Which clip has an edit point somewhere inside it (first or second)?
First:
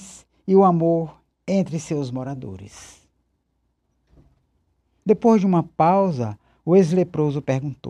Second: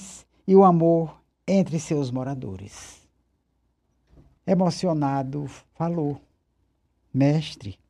second